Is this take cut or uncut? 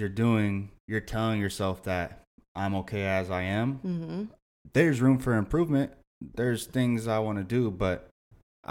uncut